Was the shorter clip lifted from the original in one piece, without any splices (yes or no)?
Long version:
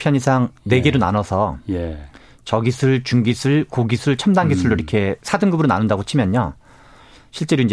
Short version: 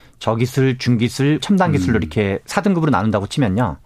no